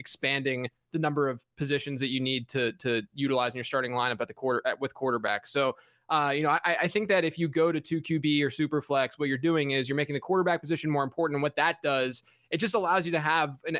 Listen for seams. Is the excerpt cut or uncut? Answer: uncut